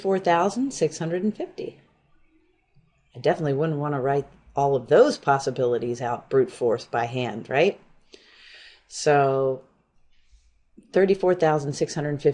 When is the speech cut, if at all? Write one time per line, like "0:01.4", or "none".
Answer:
none